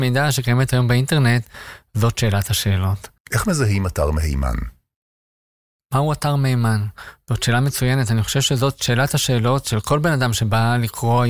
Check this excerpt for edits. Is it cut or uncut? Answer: cut